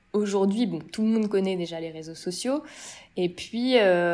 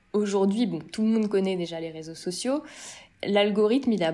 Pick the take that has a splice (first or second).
second